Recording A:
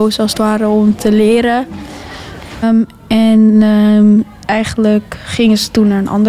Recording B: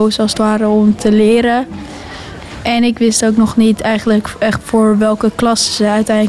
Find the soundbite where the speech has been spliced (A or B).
A